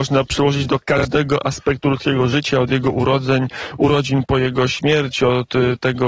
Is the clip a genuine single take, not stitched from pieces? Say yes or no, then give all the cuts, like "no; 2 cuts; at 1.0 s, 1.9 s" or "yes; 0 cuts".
no; 1 cut; at 4.3 s